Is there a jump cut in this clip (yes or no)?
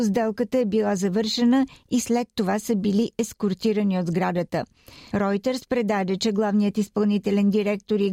yes